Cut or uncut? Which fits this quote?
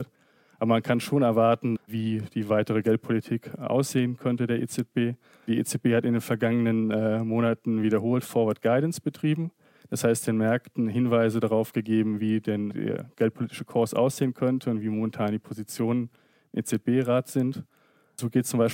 cut